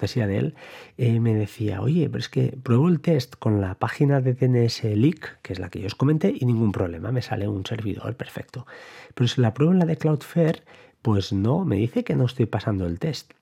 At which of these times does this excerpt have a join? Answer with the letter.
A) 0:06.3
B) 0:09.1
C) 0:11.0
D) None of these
D